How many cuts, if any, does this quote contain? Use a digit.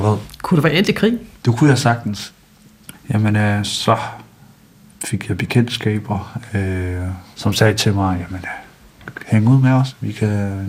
1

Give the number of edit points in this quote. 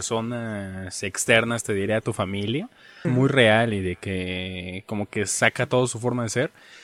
1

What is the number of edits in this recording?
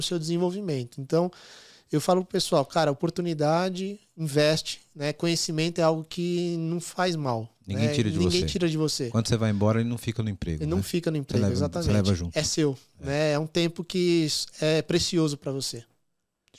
0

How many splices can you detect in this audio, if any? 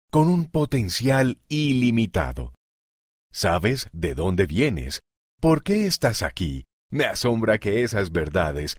1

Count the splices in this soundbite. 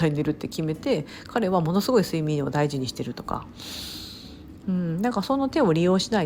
1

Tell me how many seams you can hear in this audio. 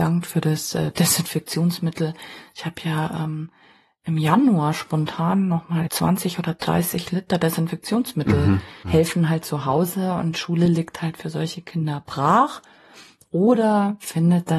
2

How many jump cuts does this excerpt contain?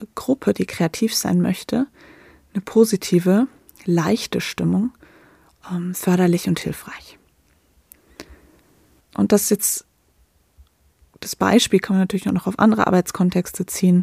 1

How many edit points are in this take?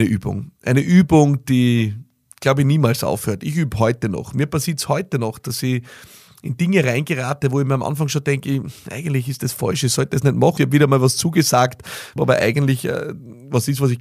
2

